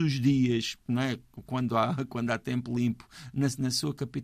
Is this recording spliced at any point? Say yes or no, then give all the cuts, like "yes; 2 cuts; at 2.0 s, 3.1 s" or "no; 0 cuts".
no; 0 cuts